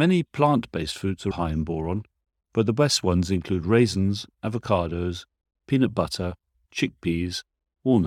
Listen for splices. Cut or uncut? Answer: cut